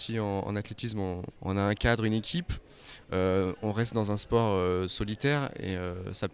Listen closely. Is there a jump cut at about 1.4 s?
yes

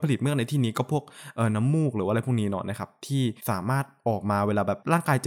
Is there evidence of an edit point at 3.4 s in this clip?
yes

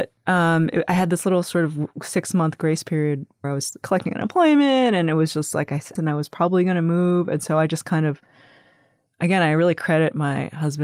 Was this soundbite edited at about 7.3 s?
no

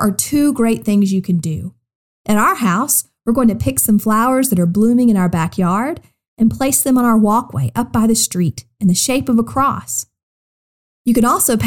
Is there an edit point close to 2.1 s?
yes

